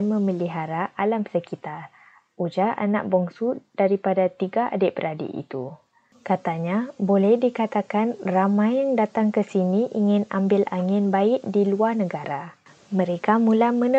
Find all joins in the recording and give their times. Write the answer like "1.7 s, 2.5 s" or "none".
none